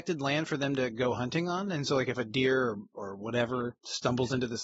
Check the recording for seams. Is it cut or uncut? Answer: uncut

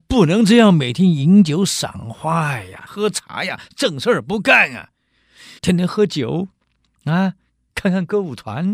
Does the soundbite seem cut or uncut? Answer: cut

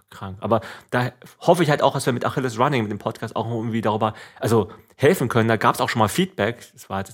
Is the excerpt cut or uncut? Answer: uncut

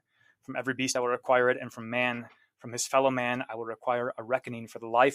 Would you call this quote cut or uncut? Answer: uncut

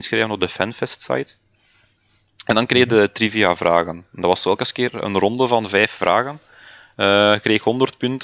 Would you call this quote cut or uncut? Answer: uncut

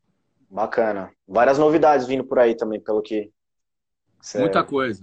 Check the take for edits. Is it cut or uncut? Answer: uncut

